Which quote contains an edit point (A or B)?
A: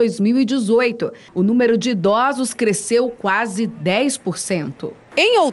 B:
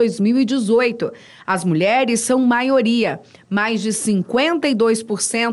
A